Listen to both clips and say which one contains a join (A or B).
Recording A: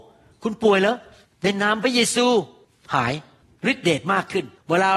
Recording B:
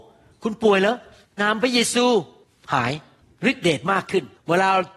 B